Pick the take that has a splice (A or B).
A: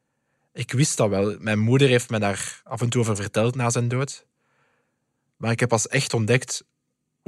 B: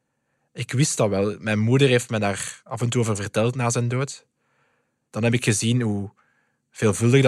B